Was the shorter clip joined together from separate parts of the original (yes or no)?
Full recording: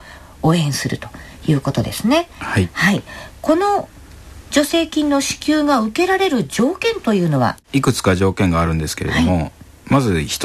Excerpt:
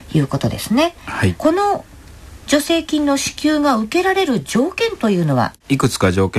yes